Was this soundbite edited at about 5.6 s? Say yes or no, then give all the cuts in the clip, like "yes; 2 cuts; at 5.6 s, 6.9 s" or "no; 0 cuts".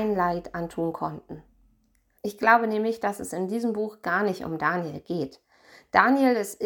no; 1 cut; at 2.2 s